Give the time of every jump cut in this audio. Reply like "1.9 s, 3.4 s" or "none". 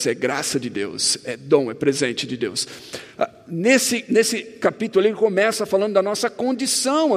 none